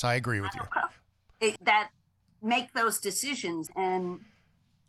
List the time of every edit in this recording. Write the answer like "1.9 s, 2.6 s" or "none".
1.6 s, 3.7 s